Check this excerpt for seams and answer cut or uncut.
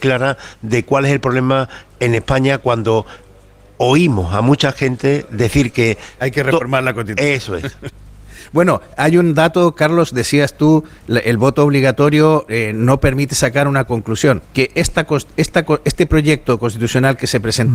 cut